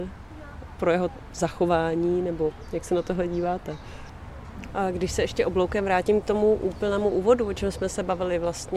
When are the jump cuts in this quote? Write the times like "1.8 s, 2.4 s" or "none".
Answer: 4.7 s